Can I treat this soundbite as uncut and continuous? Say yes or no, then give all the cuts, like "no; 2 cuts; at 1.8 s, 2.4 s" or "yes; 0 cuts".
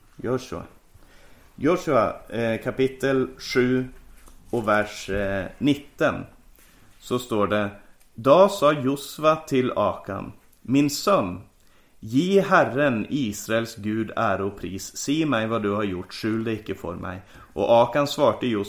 yes; 0 cuts